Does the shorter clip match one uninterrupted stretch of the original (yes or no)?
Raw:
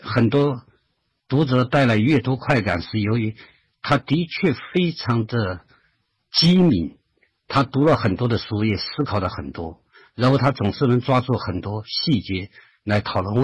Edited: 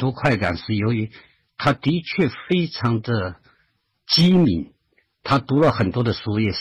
yes